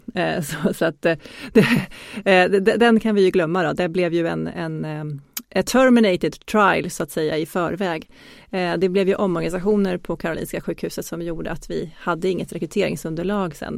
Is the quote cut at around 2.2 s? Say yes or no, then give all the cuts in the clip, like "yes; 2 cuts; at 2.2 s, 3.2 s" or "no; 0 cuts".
no; 0 cuts